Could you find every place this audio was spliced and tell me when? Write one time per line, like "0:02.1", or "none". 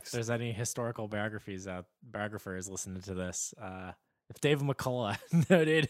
none